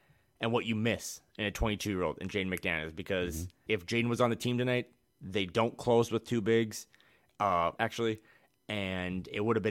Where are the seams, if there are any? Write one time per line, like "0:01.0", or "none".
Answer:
0:03.7
0:07.8